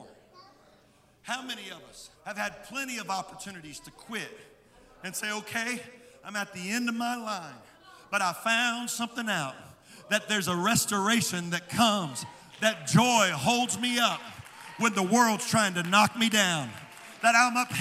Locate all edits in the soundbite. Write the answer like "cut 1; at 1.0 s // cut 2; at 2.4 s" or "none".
cut 1; at 2.2 s